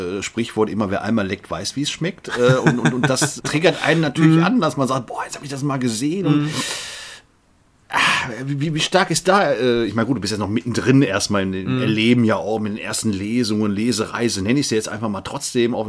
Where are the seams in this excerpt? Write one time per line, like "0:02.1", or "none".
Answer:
0:03.4